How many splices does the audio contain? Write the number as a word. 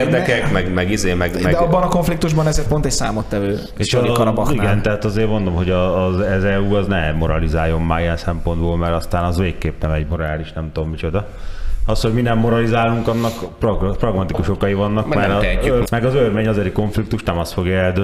one